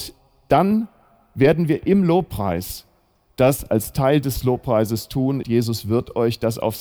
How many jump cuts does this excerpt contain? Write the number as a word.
one